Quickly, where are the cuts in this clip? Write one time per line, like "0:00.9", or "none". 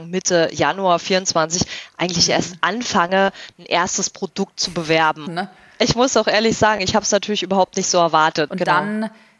0:05.3
0:08.5